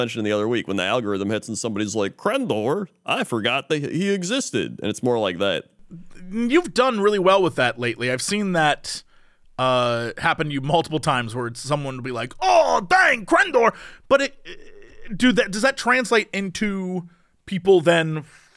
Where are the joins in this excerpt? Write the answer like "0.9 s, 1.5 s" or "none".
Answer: none